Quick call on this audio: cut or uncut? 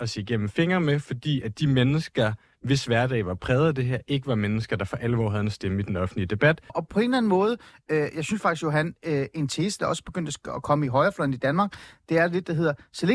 cut